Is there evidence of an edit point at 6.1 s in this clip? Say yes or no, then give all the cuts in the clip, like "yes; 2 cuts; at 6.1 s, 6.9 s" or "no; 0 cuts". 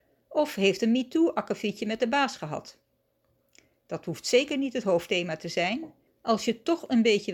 yes; 1 cut; at 6.1 s